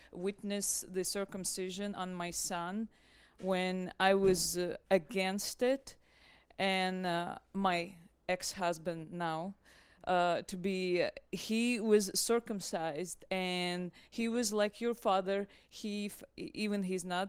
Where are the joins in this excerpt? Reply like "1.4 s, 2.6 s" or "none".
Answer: none